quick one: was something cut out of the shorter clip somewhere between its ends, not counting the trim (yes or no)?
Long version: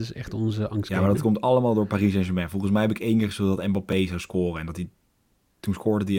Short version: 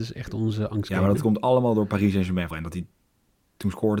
yes